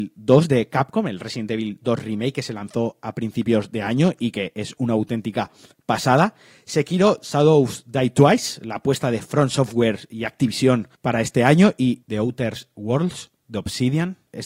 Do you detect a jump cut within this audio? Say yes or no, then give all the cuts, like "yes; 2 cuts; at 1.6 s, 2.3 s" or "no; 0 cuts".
no; 0 cuts